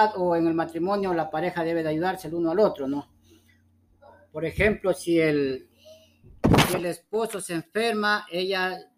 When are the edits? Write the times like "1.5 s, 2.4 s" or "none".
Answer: none